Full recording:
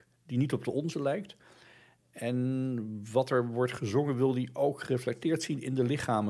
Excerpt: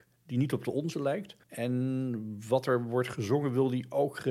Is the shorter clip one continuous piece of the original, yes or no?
no